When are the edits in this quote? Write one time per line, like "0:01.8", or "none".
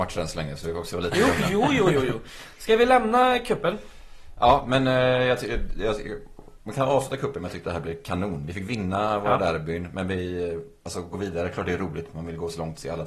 none